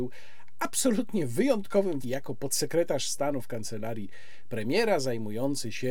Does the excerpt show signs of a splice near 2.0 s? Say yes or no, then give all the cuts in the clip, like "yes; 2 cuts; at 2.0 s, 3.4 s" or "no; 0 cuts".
yes; 1 cut; at 2.0 s